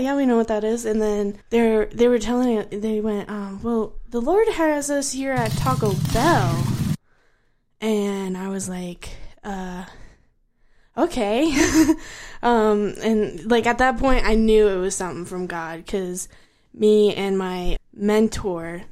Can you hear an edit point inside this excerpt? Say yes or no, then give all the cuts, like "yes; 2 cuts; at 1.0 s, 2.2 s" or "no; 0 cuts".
yes; 2 cuts; at 1.4 s, 17.8 s